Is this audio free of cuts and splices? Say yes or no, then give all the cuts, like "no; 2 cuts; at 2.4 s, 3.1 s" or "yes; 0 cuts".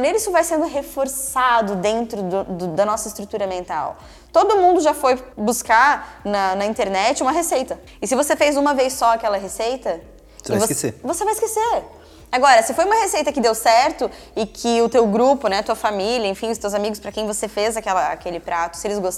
yes; 0 cuts